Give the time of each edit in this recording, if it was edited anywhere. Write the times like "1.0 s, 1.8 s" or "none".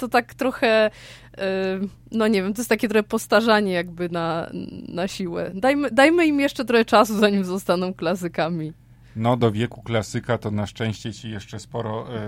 none